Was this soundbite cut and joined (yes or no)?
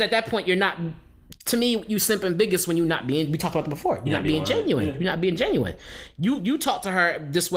no